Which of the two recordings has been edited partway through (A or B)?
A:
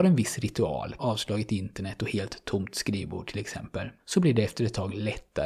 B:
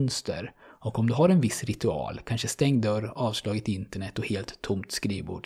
A